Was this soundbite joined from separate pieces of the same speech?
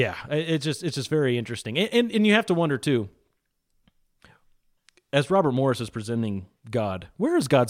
no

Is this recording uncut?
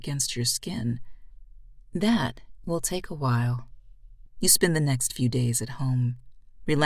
no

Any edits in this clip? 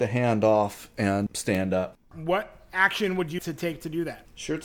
yes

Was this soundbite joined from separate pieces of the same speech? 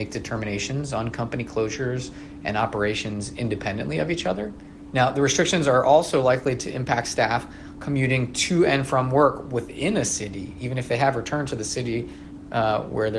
yes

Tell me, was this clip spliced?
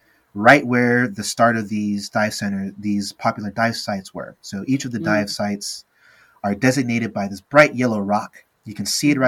no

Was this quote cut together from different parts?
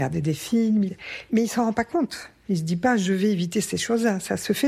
no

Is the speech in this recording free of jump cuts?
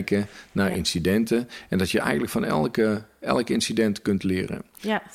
yes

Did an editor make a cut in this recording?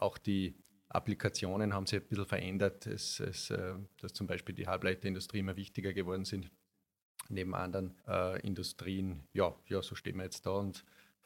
yes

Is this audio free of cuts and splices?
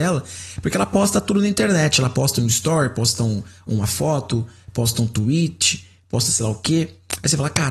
yes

